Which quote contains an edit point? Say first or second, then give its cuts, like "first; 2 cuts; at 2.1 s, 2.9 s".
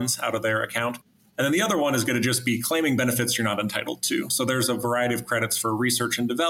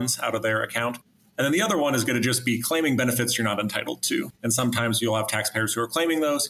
second; 1 cut; at 4.3 s